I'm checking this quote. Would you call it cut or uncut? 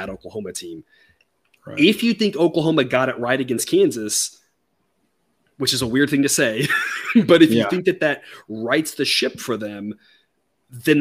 uncut